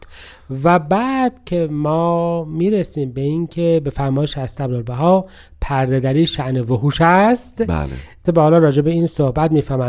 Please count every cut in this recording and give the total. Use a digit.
1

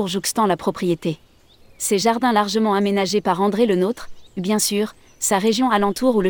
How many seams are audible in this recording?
2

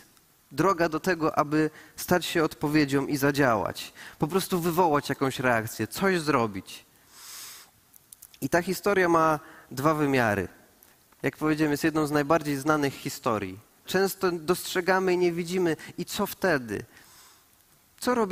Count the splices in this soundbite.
1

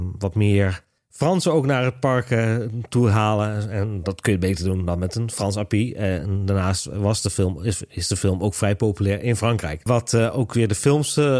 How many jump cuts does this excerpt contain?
1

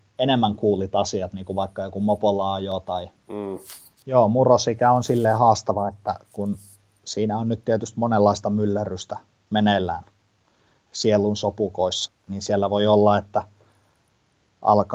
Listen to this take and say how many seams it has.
2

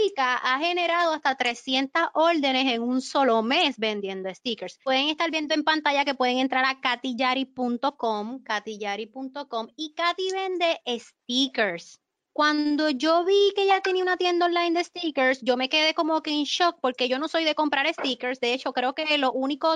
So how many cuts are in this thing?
1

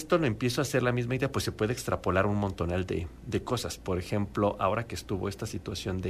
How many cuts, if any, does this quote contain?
1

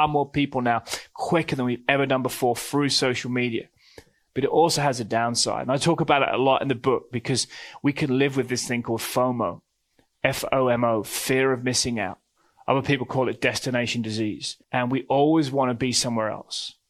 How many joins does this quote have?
1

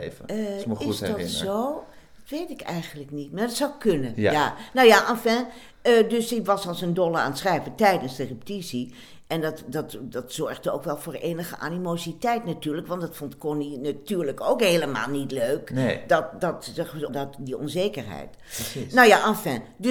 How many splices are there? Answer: 1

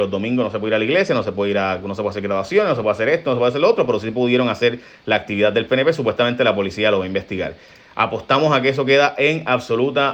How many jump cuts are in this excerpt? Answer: 0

